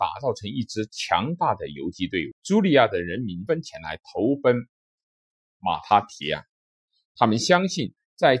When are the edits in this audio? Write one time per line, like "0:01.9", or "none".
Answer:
0:02.3
0:03.5